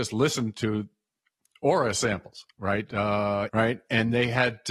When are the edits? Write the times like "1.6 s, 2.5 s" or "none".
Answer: 3.5 s